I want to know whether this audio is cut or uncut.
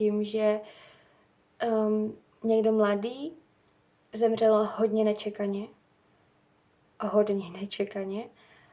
uncut